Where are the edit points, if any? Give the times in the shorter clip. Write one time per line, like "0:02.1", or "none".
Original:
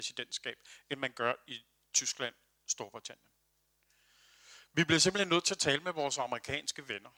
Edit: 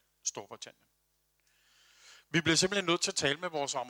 none